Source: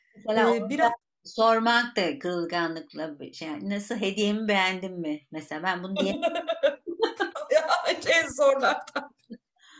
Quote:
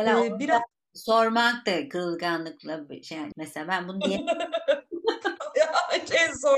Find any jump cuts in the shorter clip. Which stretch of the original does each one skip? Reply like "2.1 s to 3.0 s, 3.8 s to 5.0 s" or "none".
3.6 s to 5.3 s